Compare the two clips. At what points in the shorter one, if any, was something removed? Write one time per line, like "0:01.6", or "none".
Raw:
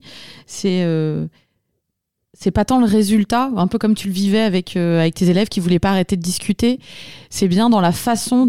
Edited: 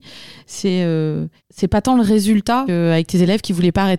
0:01.4
0:02.7